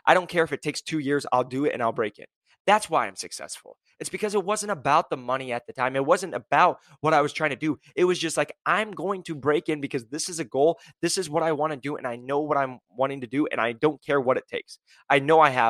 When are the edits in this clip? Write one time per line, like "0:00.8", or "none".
none